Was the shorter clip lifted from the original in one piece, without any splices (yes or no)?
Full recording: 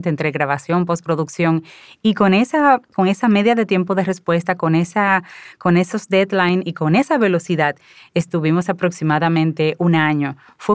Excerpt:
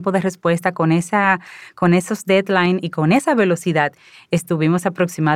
yes